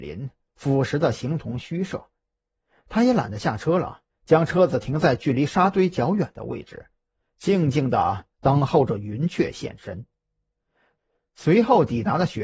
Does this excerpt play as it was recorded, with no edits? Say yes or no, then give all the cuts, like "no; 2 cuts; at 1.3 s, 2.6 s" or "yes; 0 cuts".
no; 1 cut; at 4.1 s